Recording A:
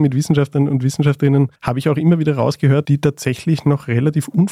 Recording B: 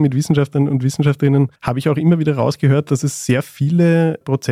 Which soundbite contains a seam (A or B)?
A